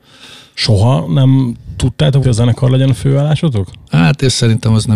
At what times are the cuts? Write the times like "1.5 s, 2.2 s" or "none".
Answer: 2.2 s, 3.9 s